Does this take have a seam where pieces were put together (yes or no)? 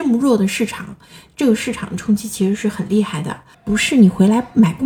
yes